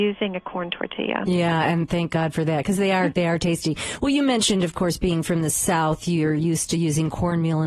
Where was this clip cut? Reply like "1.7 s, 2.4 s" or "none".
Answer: 3.1 s